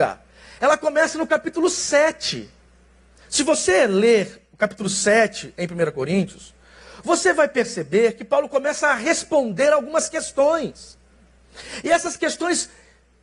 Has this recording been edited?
no; 0 cuts

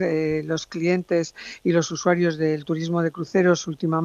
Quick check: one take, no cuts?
yes; 0 cuts

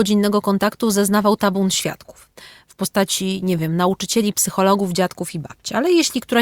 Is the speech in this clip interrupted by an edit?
no; 0 cuts

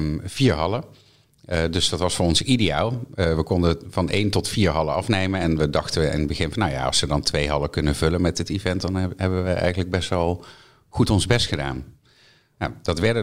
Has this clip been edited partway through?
no; 0 cuts

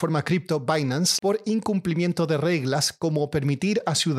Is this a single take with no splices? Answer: no; 1 cut; at 1.2 s

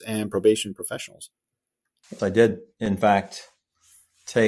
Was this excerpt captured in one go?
no; 1 cut; at 2.2 s

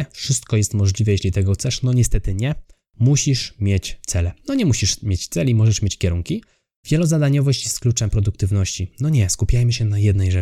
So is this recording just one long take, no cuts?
yes; 0 cuts

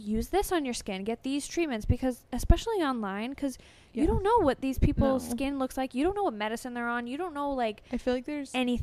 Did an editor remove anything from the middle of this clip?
no; 0 cuts

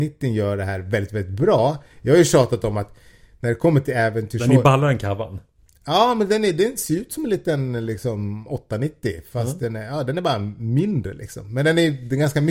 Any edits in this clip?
no; 0 cuts

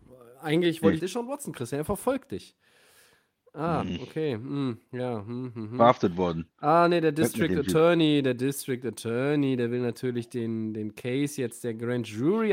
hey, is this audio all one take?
no; 1 cut; at 1.0 s

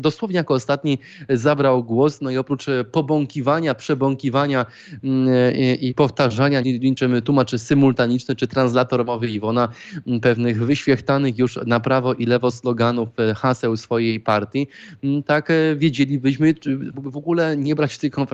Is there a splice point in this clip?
yes; 2 cuts; at 6.6 s, 16.9 s

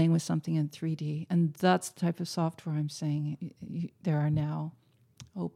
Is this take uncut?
yes; 0 cuts

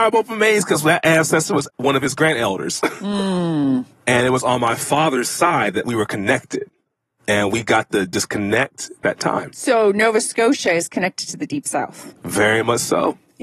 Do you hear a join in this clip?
yes; 1 cut; at 1.7 s

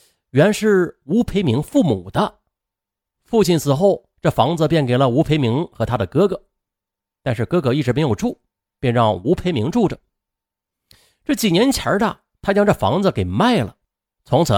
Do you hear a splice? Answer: no; 0 cuts

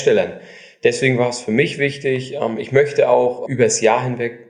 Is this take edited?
yes; 1 cut; at 3.5 s

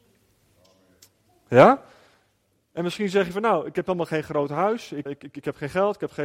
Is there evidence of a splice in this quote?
yes; 1 cut; at 5.1 s

